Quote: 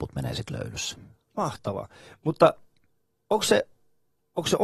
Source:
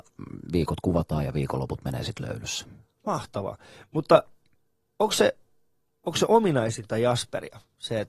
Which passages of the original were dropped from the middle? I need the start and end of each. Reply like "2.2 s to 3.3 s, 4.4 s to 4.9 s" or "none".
none